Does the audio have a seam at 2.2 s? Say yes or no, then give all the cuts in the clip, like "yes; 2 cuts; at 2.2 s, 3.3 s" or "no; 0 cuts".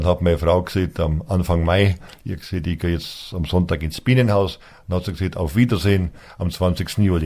no; 0 cuts